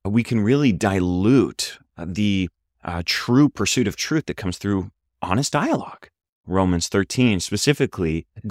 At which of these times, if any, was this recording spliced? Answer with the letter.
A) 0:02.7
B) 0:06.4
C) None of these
B